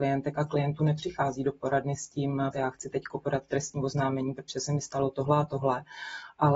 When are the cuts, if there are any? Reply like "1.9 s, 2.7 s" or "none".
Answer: 2.5 s